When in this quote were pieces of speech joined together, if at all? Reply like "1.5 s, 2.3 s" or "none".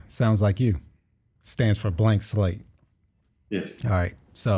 1.4 s